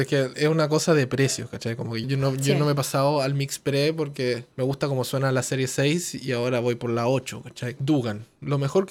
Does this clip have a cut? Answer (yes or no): yes